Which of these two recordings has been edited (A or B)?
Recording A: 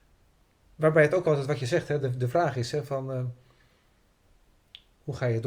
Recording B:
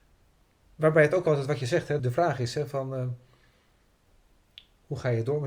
B